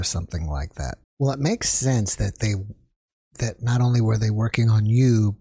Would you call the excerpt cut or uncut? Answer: cut